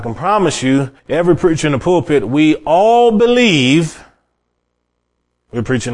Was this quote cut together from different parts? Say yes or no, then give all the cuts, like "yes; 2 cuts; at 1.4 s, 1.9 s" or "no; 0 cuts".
yes; 1 cut; at 1.0 s